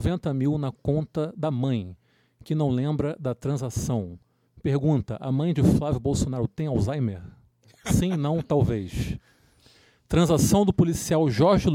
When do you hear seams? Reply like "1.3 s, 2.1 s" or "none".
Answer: none